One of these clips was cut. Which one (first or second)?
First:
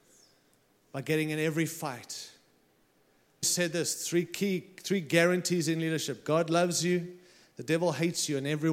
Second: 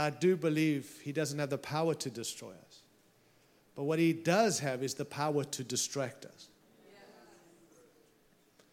first